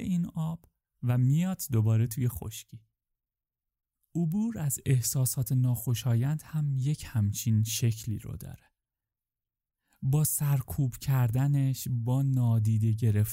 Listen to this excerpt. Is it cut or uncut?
uncut